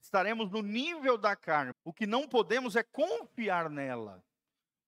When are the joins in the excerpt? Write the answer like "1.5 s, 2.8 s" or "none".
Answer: 1.7 s